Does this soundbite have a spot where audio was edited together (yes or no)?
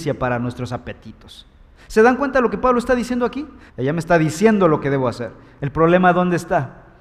yes